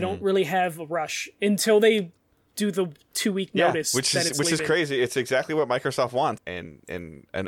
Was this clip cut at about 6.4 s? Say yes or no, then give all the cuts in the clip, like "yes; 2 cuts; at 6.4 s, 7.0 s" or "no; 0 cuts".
yes; 1 cut; at 6.4 s